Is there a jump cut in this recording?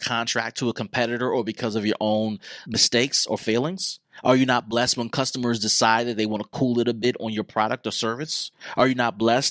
yes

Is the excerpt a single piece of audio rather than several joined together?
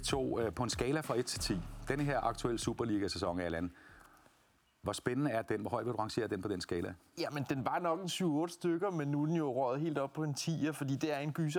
yes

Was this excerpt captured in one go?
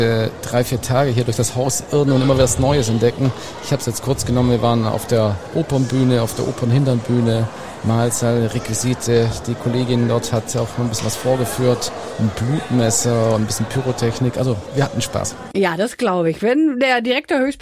yes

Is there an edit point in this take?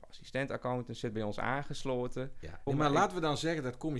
yes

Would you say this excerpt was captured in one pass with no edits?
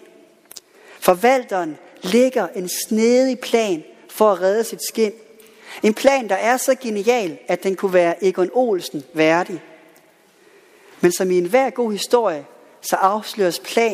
yes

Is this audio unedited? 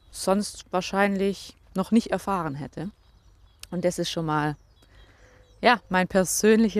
no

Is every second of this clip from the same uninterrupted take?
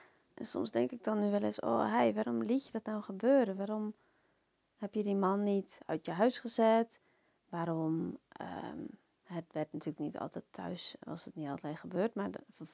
yes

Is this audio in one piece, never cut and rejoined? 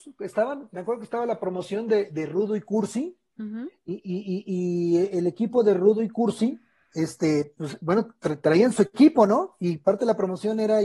yes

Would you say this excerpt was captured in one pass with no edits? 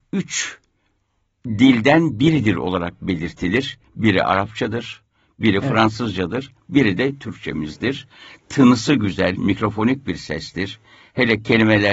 yes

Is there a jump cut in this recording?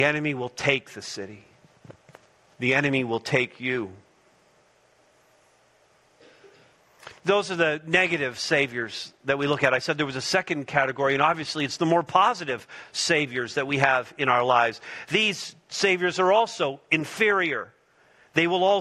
no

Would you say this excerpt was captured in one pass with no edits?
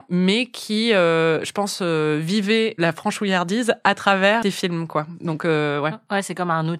no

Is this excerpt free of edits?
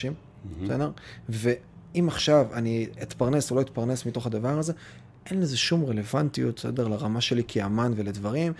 yes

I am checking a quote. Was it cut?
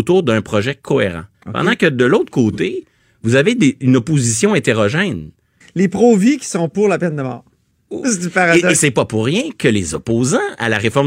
yes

